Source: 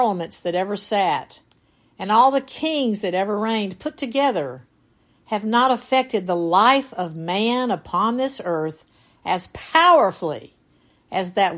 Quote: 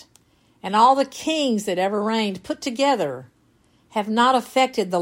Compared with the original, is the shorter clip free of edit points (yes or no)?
yes